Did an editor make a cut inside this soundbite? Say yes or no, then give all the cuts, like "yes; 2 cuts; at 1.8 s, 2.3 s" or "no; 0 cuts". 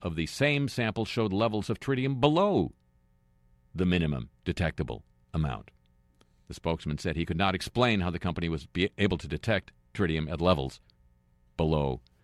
no; 0 cuts